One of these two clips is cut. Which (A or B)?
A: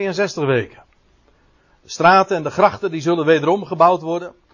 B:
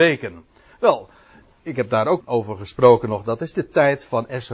B